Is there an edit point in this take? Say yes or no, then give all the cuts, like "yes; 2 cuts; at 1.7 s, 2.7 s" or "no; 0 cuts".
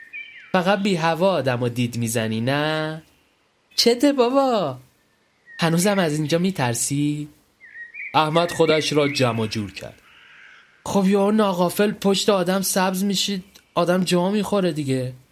yes; 1 cut; at 3.7 s